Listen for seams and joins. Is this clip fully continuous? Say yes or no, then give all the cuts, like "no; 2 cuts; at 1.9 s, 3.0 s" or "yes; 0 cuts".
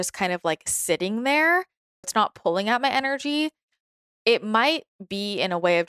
no; 1 cut; at 2.0 s